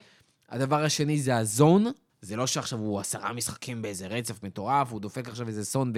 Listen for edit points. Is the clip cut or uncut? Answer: cut